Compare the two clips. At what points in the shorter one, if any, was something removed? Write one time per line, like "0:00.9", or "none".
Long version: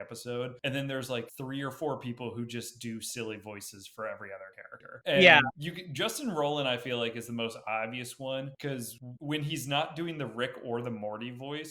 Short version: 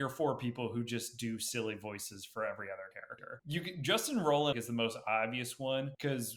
0:03.4
0:04.5